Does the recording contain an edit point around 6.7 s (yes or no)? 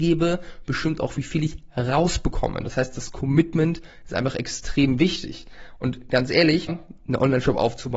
yes